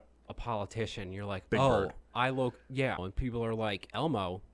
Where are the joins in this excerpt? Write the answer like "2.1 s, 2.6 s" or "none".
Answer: 3.0 s